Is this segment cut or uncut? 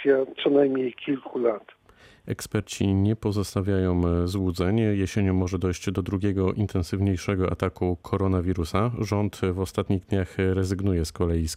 uncut